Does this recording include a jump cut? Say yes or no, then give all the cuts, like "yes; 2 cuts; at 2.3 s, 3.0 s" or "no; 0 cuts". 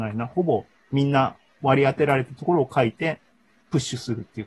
no; 0 cuts